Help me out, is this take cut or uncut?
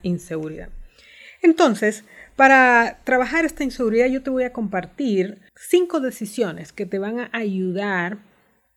cut